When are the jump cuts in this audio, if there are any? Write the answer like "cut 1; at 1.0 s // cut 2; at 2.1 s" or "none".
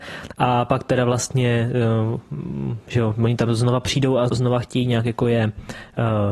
cut 1; at 4.3 s

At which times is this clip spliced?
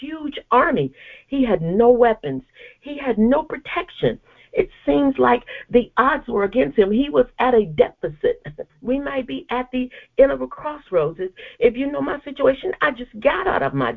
cut 1; at 8.7 s

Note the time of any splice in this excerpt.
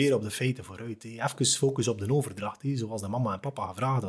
none

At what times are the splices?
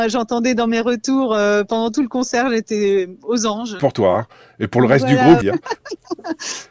cut 1; at 3.8 s // cut 2; at 5.4 s

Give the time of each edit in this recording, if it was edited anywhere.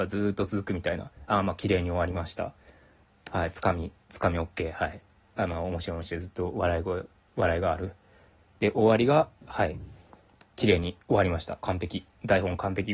cut 1; at 4.0 s

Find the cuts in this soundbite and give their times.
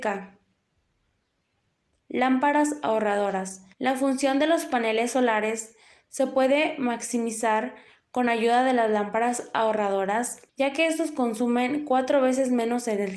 cut 1; at 3.7 s // cut 2; at 10.5 s

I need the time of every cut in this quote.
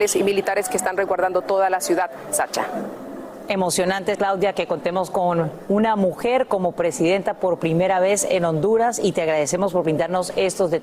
cut 1; at 4.2 s

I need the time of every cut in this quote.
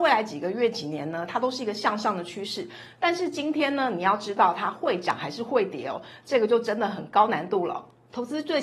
none

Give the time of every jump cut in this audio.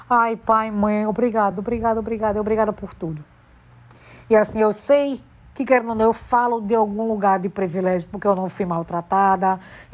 none

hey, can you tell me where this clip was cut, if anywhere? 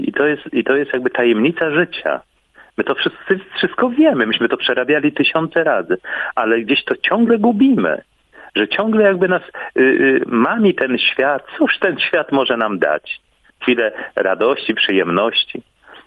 none

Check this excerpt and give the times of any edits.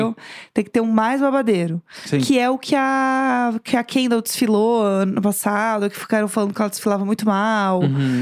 none

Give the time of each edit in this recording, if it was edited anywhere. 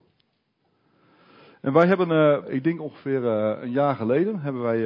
cut 1; at 2.4 s

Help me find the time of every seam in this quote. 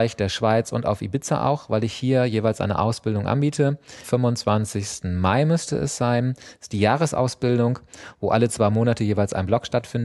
cut 1; at 4.0 s

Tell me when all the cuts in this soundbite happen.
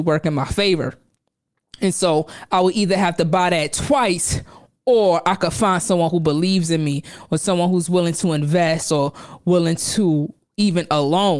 none

